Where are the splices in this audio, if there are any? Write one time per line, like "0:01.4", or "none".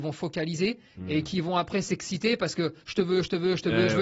none